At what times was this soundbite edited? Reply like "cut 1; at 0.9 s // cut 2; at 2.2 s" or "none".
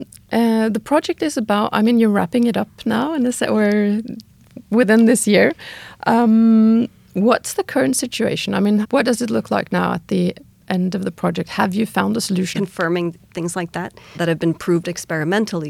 cut 1; at 8.8 s // cut 2; at 12.5 s // cut 3; at 14.1 s